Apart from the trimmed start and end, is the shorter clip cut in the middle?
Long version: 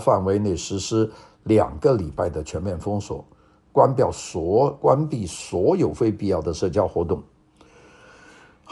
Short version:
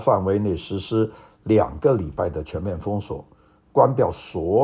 no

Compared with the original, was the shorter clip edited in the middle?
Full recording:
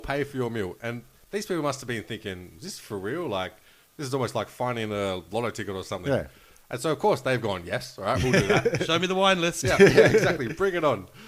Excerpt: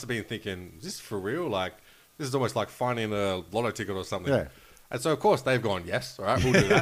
no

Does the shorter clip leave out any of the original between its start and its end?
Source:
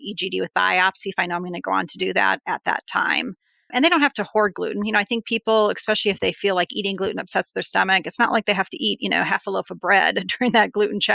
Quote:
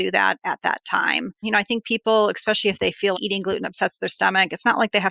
yes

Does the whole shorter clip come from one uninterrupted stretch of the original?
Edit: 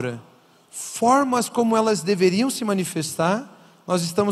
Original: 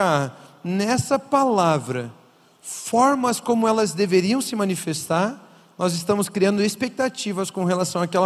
yes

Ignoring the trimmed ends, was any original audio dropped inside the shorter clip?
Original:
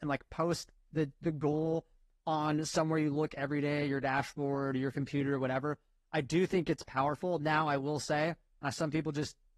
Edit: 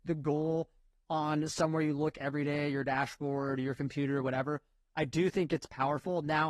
no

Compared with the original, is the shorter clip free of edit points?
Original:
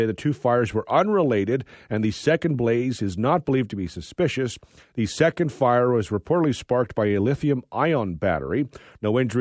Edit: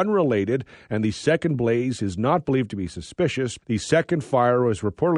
no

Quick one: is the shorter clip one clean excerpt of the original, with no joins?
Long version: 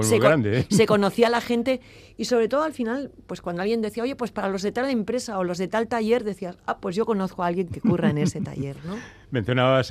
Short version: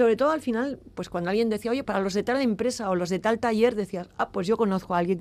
no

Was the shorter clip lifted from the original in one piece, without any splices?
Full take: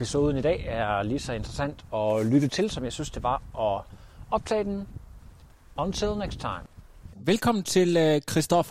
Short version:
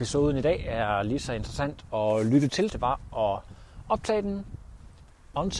no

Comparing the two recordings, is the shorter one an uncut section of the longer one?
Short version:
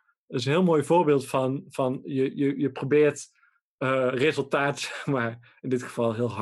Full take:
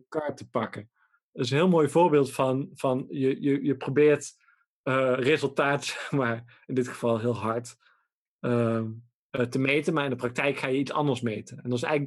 yes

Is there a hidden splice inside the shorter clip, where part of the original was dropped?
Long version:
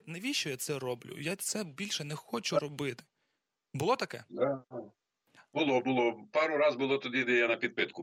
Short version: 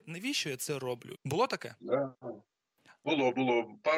yes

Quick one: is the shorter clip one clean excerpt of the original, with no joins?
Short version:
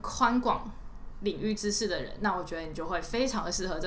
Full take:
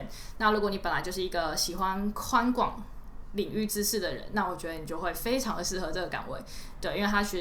yes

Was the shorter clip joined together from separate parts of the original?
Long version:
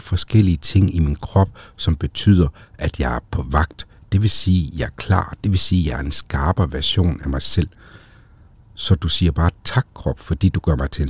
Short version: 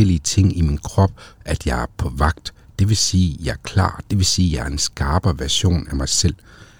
yes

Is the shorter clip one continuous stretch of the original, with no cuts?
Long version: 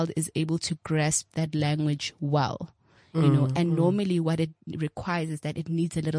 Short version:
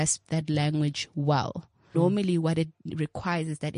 no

